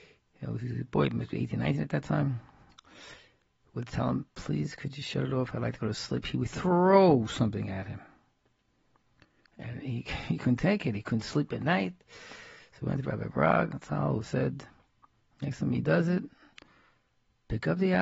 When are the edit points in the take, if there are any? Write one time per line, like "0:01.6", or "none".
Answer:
none